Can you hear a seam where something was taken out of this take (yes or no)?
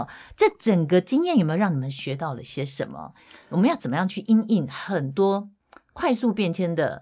no